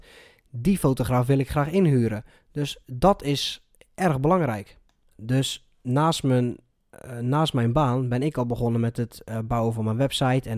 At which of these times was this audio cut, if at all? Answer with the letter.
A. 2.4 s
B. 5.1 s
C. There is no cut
B